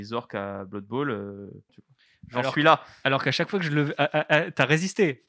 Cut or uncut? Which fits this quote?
cut